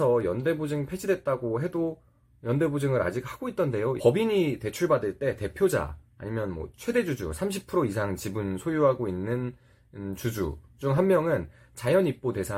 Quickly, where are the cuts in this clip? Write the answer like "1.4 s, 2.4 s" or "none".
4.0 s